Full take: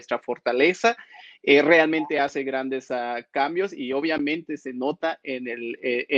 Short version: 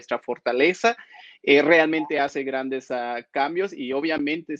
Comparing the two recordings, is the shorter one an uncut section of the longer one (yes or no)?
yes